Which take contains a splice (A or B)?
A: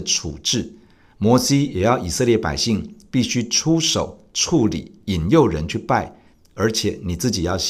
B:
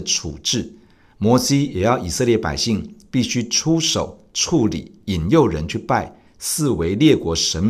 A